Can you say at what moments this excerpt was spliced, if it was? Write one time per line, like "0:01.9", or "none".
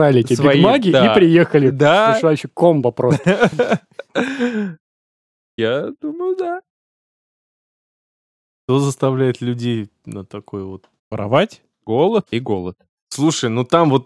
0:11.0
0:12.3